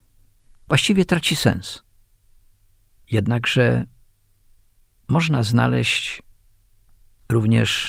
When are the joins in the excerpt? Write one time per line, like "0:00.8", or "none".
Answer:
0:03.0